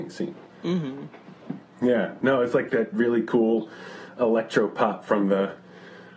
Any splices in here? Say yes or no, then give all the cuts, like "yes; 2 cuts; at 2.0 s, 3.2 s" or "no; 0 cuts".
yes; 2 cuts; at 1.6 s, 2.7 s